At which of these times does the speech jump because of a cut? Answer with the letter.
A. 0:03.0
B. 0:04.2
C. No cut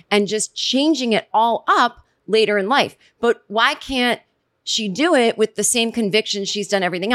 C